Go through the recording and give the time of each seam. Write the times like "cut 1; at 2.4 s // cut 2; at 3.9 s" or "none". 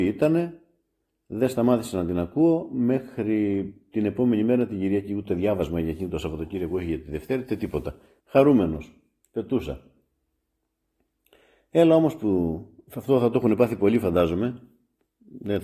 cut 1; at 8.2 s